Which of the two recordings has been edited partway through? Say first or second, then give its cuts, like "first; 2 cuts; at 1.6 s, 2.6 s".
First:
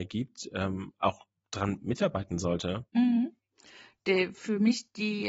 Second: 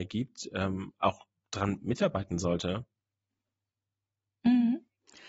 first; 1 cut; at 2.9 s